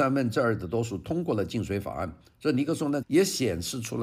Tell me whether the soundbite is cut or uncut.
cut